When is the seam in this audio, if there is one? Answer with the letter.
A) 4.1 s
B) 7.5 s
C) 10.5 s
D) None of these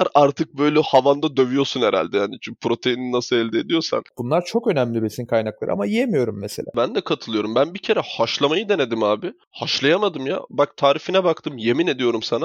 A